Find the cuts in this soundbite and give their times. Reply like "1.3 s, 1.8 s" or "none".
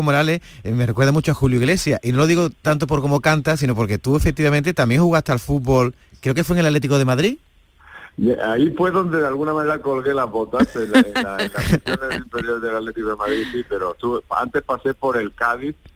none